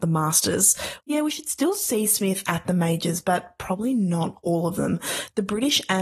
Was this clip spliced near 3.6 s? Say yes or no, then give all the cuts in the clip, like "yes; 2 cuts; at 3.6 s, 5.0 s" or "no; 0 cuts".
no; 1 cut; at 1.0 s